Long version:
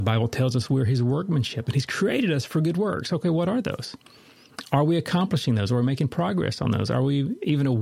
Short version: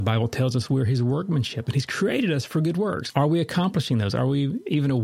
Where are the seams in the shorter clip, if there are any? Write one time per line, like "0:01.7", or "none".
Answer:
0:03.1
0:04.1